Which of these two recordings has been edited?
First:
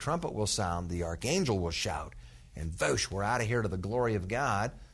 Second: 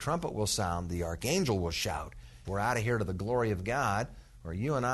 second; 1 cut; at 2.4 s

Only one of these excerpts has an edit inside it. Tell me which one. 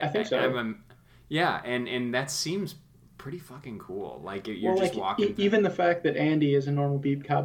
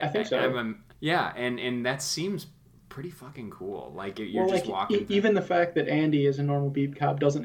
second; 1 cut; at 0.9 s

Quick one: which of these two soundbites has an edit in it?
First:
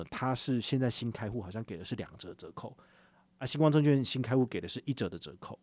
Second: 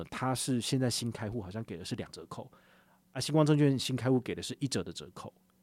second; 1 cut; at 2.1 s

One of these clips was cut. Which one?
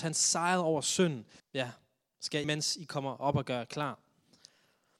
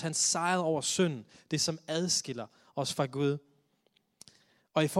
first; 2 cuts; at 1.4 s, 2.4 s

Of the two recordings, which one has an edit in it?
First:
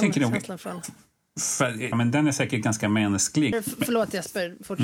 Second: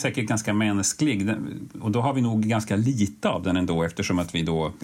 first; 2 cuts; at 1.9 s, 3.5 s

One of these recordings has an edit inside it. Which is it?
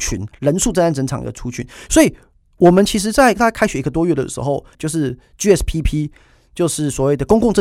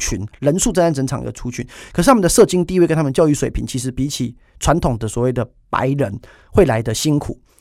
first; 2 cuts; at 1.9 s, 4.7 s

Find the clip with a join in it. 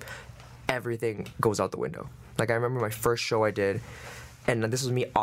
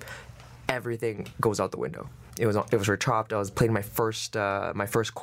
second; 1 cut; at 2.3 s

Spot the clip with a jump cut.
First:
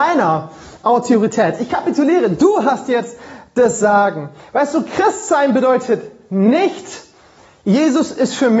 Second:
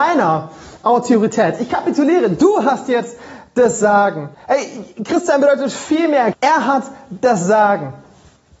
second; 2 cuts; at 4.3 s, 6.3 s

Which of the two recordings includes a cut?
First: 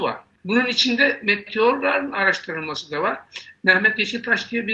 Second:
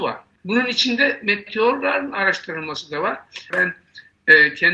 second; 1 cut; at 3.5 s

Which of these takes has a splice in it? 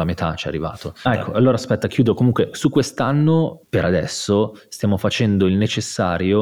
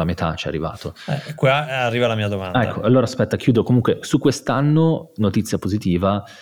first; 2 cuts; at 1.0 s, 3.6 s

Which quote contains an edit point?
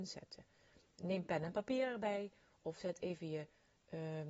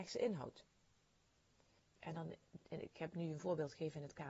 second; 1 cut; at 1.8 s

